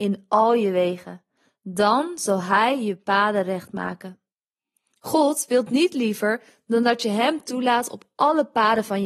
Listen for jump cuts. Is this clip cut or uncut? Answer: uncut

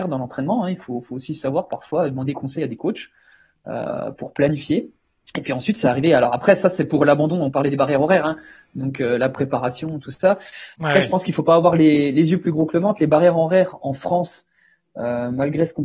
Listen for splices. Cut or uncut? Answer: uncut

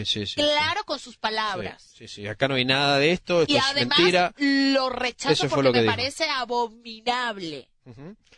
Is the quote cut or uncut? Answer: uncut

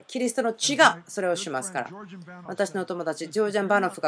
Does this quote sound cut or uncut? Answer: uncut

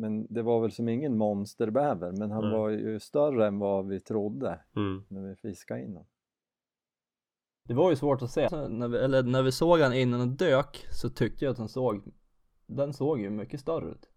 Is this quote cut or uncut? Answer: cut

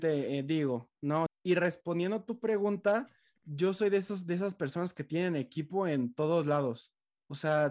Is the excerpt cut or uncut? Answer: cut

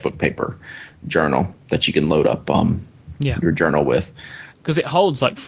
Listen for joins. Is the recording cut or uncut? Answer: cut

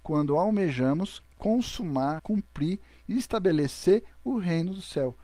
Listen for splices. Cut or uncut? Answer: cut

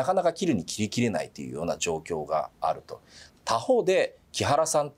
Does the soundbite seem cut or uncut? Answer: cut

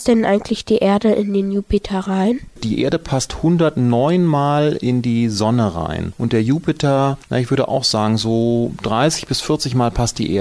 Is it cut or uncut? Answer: uncut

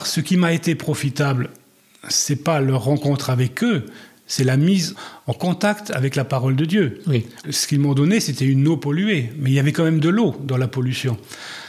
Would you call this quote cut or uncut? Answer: cut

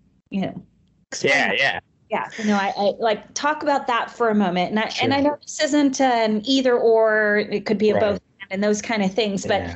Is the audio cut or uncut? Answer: cut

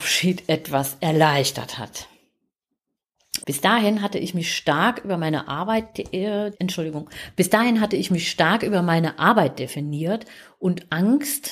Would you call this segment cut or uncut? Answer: cut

